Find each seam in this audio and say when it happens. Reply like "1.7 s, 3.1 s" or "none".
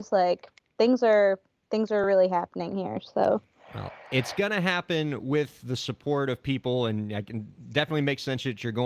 none